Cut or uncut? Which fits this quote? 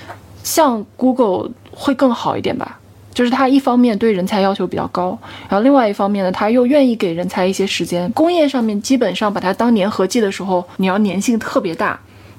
cut